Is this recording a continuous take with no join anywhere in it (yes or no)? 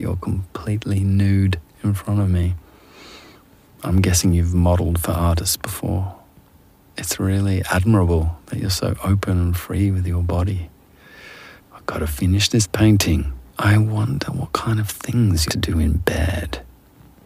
no